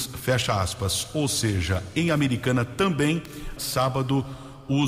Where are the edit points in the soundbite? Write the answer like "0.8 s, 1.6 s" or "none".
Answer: 3.6 s